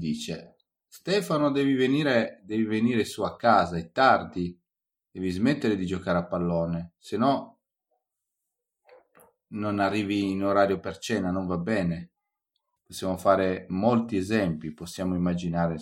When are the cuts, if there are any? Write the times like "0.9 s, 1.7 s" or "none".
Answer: 12.8 s